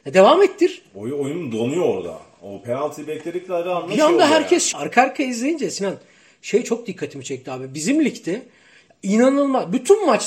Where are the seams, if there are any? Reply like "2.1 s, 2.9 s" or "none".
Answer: 4.7 s